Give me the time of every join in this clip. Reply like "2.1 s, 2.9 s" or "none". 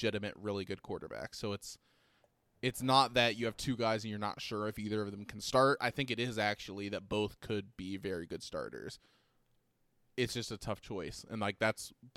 none